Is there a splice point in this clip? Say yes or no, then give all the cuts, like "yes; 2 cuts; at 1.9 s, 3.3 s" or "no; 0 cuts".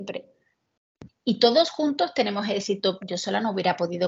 yes; 2 cuts; at 1.1 s, 3.0 s